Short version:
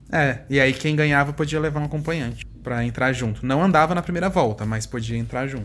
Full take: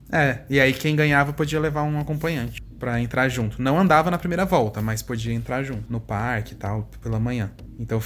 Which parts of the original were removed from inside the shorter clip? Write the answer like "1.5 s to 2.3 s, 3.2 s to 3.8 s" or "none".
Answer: 1.8 s to 1.9 s

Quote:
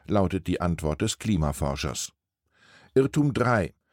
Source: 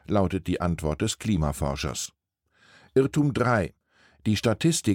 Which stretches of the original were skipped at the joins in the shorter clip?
none

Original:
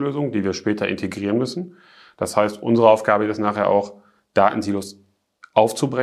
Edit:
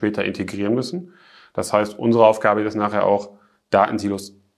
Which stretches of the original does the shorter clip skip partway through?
none

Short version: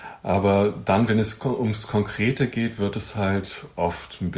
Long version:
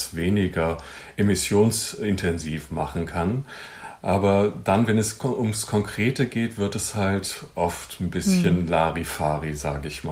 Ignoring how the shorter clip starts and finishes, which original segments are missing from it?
none

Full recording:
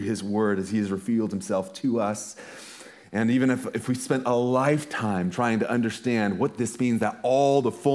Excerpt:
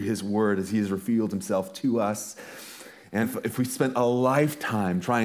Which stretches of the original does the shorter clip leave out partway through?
3.2 s to 3.5 s

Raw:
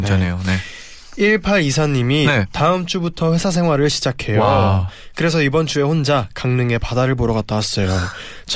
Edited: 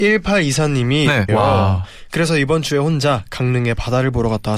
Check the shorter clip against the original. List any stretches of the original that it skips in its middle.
2.5 s to 4.3 s

